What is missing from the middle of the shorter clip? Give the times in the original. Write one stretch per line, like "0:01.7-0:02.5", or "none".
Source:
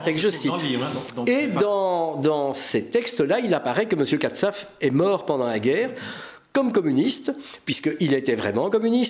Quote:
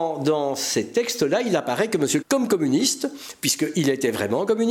0:04.2-0:06.5